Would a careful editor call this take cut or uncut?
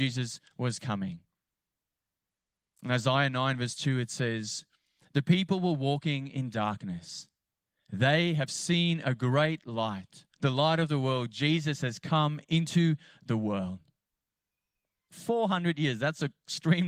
cut